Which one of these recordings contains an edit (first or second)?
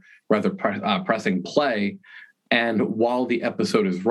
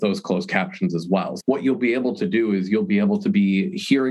second